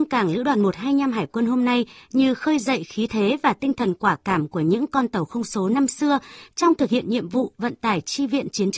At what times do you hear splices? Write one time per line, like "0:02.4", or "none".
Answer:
none